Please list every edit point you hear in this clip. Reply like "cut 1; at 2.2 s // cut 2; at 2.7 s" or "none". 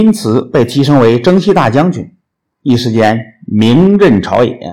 cut 1; at 2.4 s